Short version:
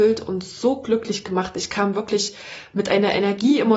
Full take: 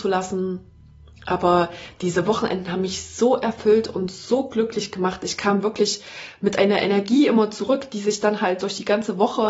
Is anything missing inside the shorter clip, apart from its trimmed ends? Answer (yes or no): no